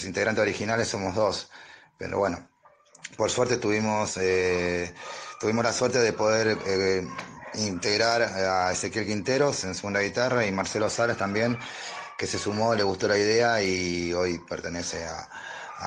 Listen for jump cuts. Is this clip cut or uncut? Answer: uncut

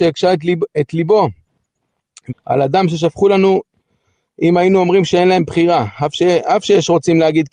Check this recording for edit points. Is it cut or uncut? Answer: cut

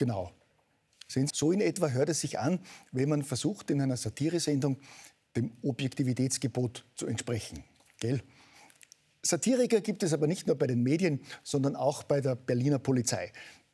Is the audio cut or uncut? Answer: cut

